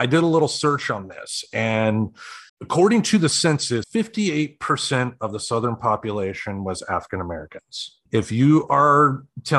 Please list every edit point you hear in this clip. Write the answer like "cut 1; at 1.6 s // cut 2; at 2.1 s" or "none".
cut 1; at 2.5 s // cut 2; at 3.8 s // cut 3; at 8.1 s